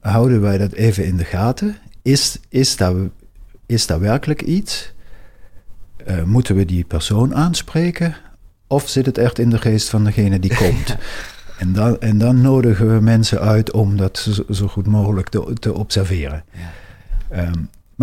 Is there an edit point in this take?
yes; 1 cut; at 2.0 s

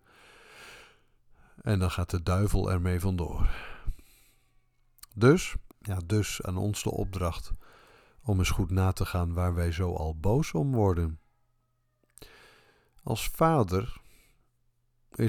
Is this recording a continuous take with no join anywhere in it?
no; 1 cut; at 5.7 s

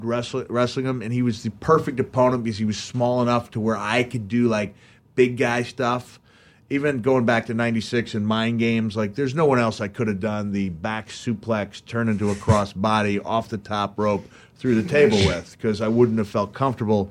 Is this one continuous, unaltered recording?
yes; 0 cuts

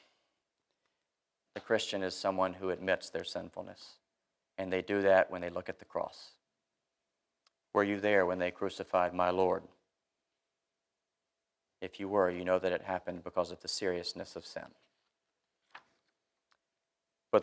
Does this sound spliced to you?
yes; 1 cut; at 1.5 s

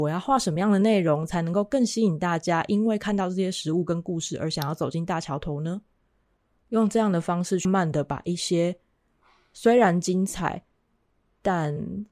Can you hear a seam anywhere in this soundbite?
yes; 2 cuts; at 6.6 s, 7.6 s

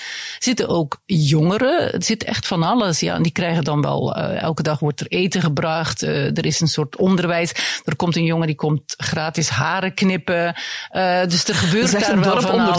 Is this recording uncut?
yes; 0 cuts

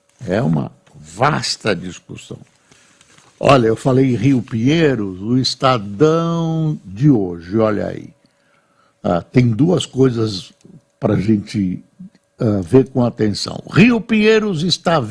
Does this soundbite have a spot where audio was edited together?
no; 0 cuts

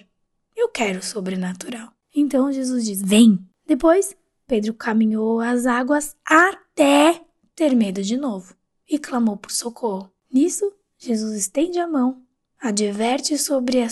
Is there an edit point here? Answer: no; 0 cuts

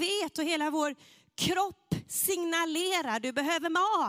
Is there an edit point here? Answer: no; 0 cuts

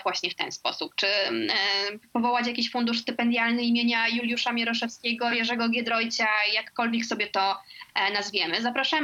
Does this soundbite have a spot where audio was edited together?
no; 0 cuts

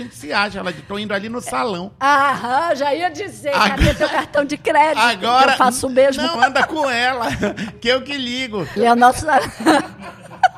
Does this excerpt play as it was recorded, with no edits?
no; 2 cuts; at 6.4 s, 8.8 s

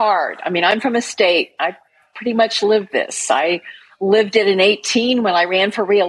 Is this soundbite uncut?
yes; 0 cuts

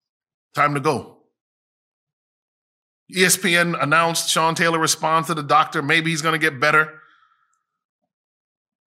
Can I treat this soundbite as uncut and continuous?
yes; 0 cuts

